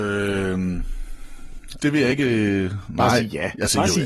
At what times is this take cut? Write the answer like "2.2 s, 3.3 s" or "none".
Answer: 1.8 s